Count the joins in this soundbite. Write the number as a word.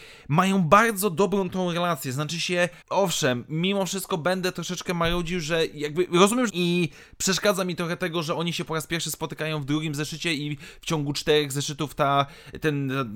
two